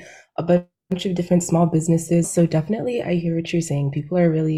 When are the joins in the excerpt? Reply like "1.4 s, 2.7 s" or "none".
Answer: 2.2 s